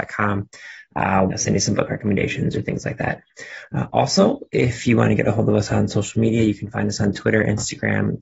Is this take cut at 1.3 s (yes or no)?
yes